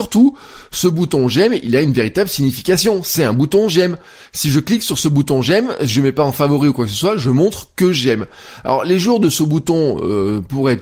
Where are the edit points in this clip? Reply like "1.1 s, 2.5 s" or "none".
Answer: none